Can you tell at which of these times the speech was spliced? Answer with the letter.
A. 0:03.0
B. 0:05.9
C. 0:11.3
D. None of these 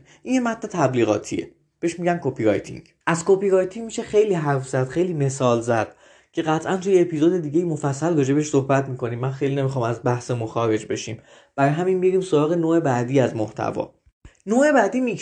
A